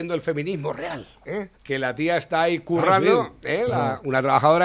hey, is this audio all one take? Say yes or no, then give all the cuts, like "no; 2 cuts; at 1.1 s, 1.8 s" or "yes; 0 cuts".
no; 1 cut; at 1.6 s